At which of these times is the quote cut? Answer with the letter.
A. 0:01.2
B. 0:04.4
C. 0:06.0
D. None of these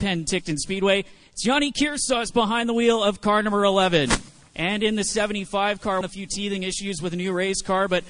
C